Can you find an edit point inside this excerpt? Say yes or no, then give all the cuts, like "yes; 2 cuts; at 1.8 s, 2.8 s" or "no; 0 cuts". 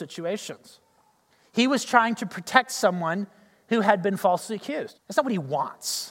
yes; 1 cut; at 4.9 s